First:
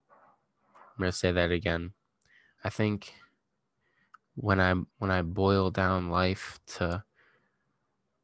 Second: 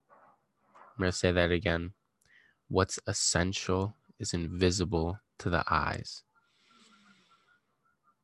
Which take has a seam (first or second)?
first